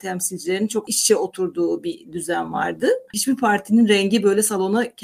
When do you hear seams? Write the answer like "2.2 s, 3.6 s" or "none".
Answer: none